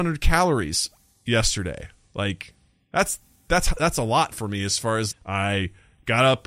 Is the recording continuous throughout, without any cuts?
no; 1 cut; at 5.1 s

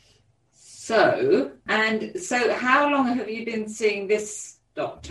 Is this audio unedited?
no; 1 cut; at 1.7 s

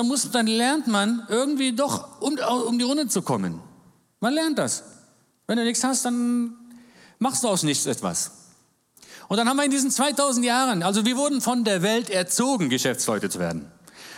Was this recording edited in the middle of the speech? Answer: no; 0 cuts

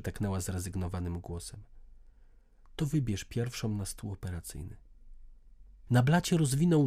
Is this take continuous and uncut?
no; 1 cut; at 5.9 s

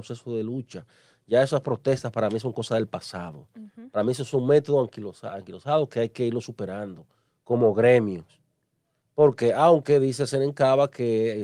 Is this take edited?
no; 0 cuts

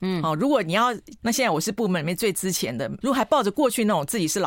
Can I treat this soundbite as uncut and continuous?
no; 2 cuts; at 1.2 s, 3.0 s

